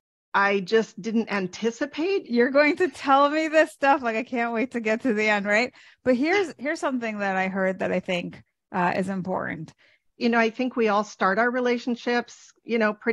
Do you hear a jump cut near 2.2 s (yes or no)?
yes